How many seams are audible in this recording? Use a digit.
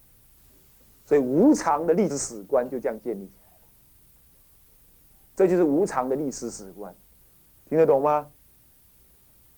1